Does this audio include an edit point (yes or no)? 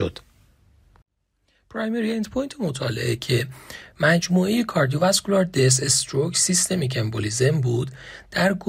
no